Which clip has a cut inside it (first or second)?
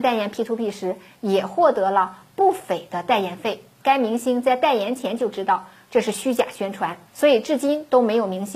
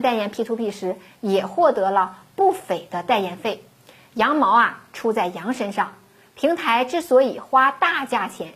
first